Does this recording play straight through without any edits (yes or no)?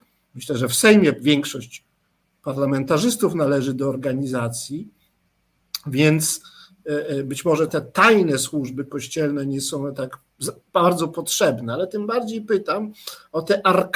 no